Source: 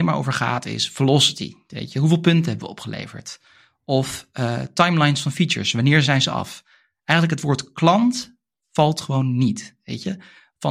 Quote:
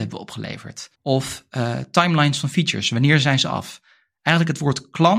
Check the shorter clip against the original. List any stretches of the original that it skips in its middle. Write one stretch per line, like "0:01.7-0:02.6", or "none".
0:03.4-0:03.8

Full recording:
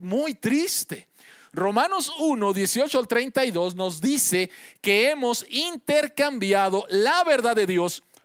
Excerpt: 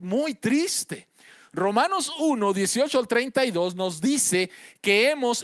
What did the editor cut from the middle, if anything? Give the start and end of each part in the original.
none

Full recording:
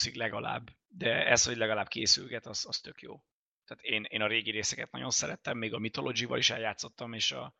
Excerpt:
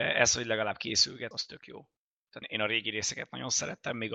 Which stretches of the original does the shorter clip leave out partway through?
0:02.4-0:02.7
0:03.8-0:04.0

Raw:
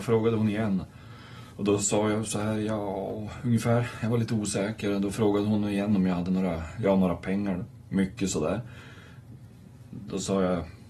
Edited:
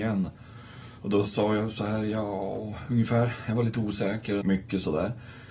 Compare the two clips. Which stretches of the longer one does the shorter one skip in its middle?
0:04.9-0:07.9

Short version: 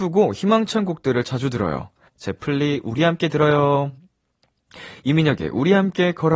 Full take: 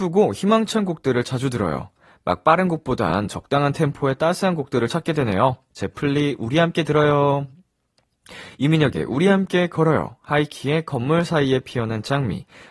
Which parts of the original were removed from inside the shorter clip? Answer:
0:02.1-0:05.6

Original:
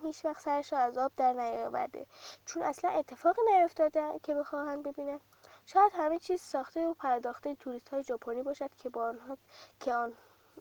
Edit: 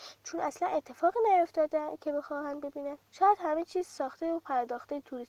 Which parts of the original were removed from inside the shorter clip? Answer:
0:05.3-0:05.6

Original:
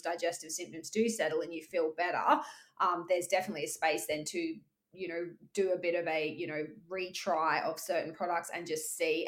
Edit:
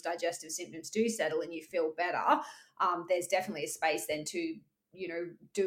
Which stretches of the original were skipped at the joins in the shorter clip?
none

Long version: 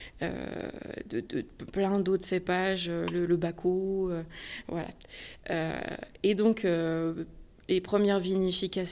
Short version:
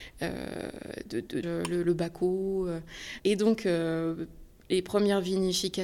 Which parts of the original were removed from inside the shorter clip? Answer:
0:01.4-0:02.9
0:04.6-0:06.2

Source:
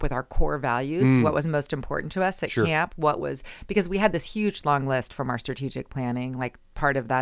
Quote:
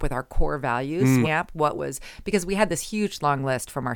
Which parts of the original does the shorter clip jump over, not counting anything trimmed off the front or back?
0:01.2-0:02.7

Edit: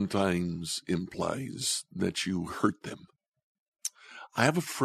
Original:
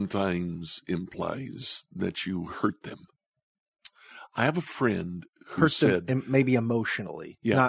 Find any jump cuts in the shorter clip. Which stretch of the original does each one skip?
none

